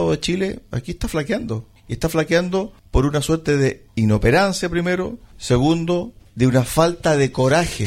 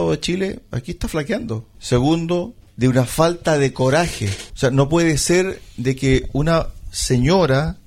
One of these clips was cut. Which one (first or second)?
second